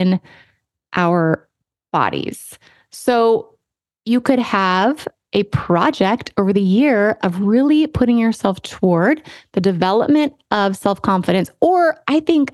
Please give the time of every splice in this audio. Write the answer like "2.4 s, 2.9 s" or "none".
none